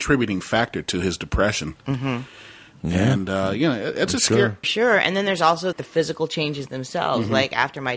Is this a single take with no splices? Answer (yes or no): no